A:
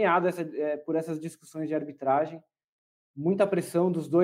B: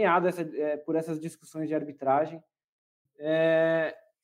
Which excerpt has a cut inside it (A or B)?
B